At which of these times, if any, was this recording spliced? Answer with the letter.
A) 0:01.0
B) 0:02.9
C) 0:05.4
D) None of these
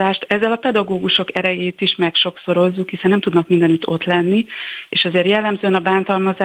D